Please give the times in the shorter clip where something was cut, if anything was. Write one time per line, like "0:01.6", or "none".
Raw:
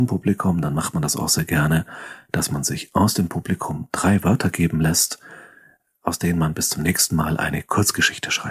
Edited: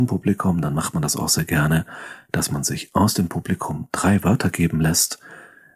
none

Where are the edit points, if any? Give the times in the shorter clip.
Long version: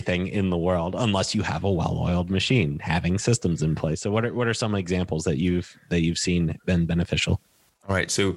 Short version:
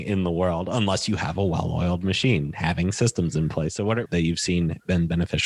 0:04.1

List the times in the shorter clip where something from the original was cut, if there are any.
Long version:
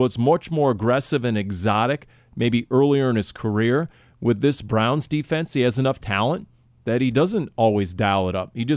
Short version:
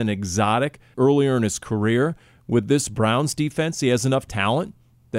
0:00.9

